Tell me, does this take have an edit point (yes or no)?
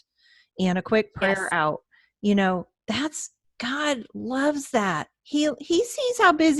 no